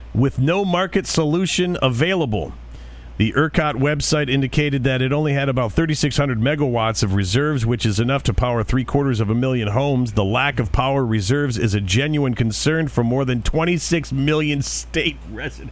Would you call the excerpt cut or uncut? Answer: uncut